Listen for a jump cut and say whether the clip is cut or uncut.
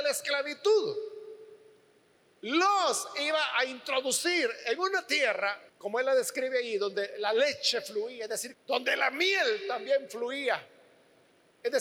cut